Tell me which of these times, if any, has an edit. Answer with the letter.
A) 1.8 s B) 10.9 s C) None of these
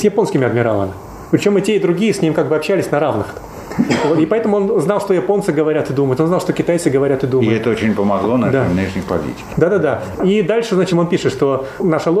B